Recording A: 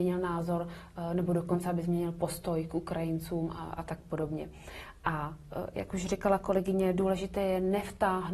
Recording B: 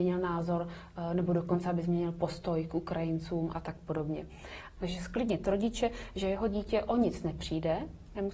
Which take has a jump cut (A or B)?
B